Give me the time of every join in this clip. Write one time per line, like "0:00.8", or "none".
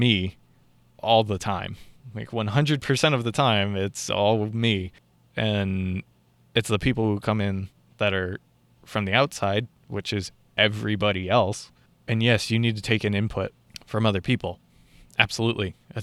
none